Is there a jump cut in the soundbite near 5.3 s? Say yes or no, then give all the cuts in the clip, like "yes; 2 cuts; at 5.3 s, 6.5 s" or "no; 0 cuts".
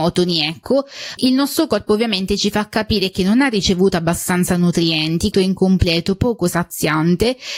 yes; 2 cuts; at 1.2 s, 5.3 s